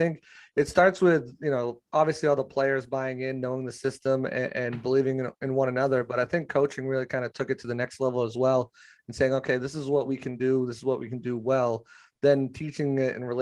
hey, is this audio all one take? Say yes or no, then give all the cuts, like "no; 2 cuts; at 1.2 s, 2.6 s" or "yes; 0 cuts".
no; 1 cut; at 1.9 s